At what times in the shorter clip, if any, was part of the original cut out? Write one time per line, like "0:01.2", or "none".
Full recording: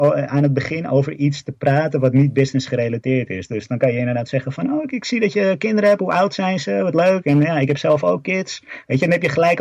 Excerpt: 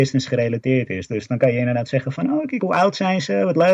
0:02.6